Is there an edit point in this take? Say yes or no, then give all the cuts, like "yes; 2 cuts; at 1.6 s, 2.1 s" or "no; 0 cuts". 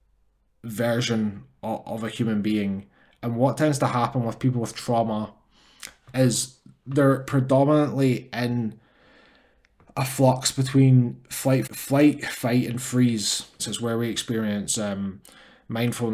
yes; 2 cuts; at 11.7 s, 13.6 s